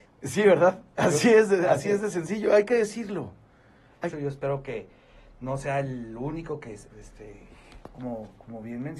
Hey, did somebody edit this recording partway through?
yes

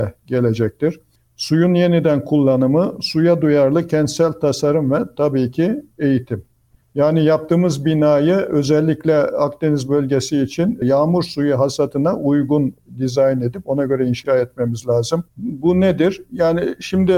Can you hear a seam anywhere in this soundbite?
yes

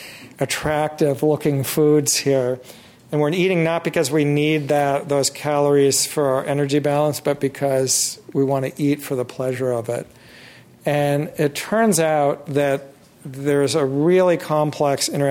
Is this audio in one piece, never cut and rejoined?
yes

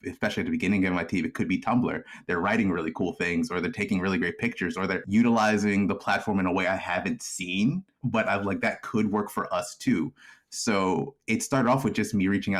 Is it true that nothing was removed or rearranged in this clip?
yes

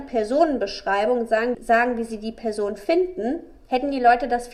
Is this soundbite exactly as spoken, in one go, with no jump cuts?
no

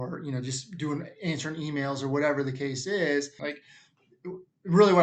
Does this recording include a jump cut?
yes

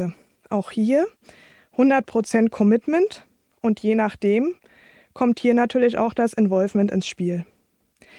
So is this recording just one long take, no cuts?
yes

